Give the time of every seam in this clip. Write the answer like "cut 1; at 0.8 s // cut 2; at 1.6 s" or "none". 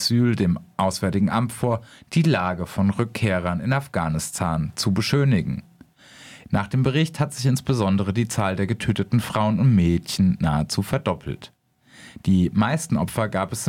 cut 1; at 6.5 s